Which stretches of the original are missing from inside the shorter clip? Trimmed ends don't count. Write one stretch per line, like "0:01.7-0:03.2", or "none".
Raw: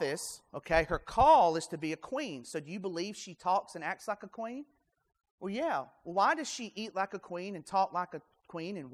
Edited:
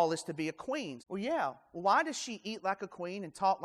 0:02.4-0:05.3